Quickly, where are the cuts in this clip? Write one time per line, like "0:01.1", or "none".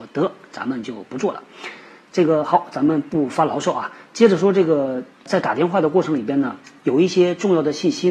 0:05.1